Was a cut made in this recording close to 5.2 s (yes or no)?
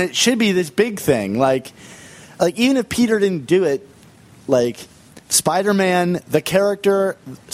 yes